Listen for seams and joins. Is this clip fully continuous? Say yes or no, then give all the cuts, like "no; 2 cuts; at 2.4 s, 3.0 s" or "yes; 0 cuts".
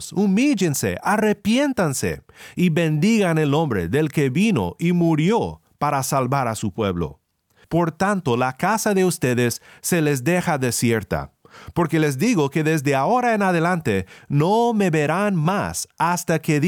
no; 1 cut; at 7.6 s